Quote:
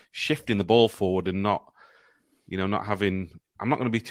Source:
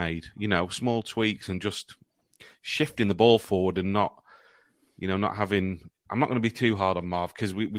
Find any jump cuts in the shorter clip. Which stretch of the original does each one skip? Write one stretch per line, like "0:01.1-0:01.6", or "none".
none